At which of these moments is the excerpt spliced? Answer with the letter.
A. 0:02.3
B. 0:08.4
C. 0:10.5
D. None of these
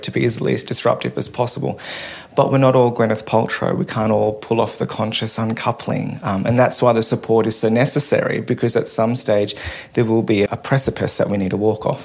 C